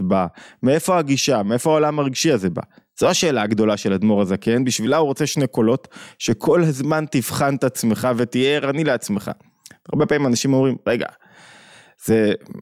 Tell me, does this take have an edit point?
no; 0 cuts

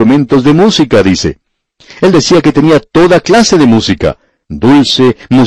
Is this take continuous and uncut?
no; 1 cut; at 4.4 s

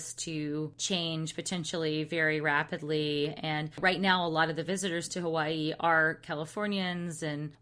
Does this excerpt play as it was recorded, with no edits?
yes; 0 cuts

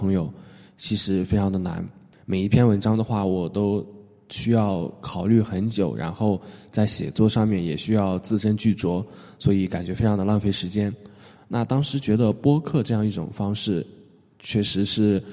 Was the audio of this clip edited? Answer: yes; 1 cut; at 2.1 s

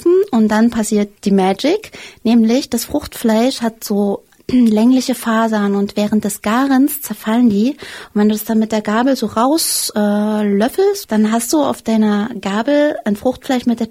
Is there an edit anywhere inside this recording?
yes; 2 cuts; at 1.2 s, 11.0 s

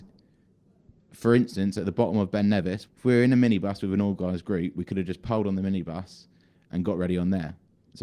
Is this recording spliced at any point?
yes; 1 cut; at 2.9 s

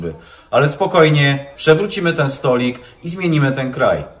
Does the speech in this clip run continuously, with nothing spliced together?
no; 1 cut; at 1.6 s

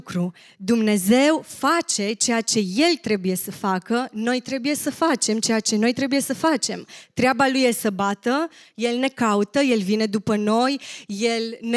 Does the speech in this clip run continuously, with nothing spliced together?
yes; 0 cuts

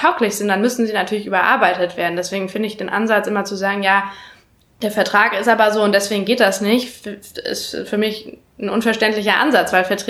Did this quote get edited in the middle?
no; 0 cuts

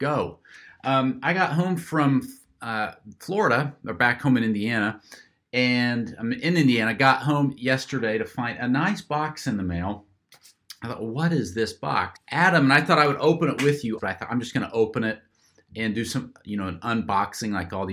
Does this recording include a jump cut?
yes; 2 cuts; at 12.1 s, 14.0 s

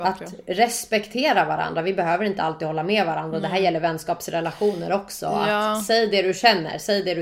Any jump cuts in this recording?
no; 0 cuts

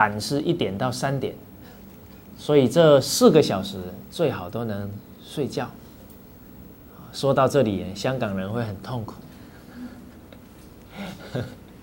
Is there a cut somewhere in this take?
no; 0 cuts

